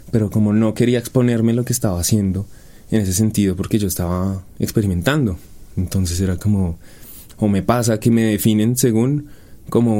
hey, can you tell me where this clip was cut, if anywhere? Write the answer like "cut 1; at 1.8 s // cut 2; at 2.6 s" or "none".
cut 1; at 7.3 s